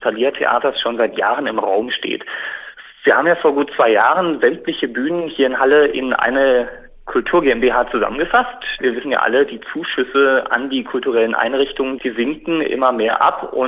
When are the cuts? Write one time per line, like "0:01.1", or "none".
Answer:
0:08.8
0:12.0